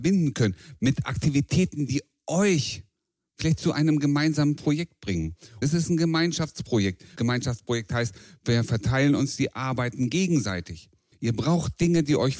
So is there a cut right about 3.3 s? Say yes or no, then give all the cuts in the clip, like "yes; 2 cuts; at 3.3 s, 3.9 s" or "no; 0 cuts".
no; 3 cuts; at 5.6 s, 7.2 s, 11.1 s